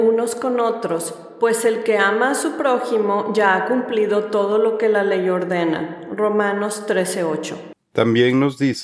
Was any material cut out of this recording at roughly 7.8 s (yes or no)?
yes